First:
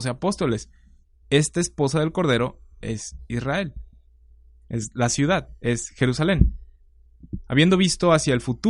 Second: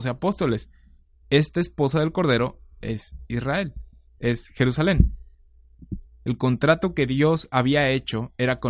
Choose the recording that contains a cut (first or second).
second